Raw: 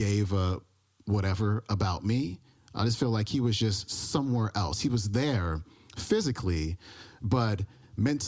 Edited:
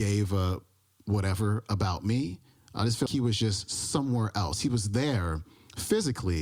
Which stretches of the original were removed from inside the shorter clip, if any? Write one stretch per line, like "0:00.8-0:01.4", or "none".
0:03.1-0:03.3